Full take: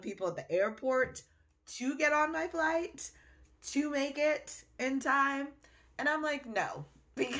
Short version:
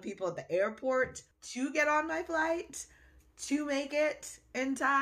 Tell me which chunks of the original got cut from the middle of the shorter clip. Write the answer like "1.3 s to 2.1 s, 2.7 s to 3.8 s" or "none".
1.3 s to 1.6 s